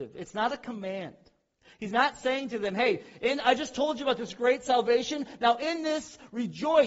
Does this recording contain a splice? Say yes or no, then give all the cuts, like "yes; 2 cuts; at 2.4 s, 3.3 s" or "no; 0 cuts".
no; 0 cuts